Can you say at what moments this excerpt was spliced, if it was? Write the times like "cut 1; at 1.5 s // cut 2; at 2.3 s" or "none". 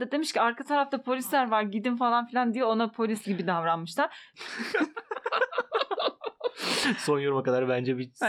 cut 1; at 4.3 s